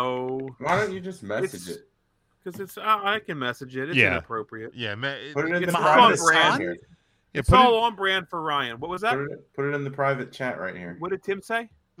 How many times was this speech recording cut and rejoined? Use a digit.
0